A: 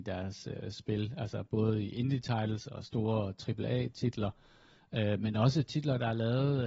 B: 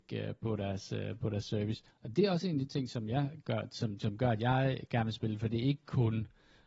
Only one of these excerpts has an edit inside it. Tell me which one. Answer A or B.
B